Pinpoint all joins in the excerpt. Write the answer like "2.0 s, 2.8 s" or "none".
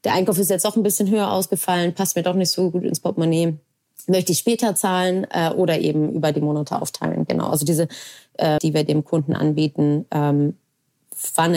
8.6 s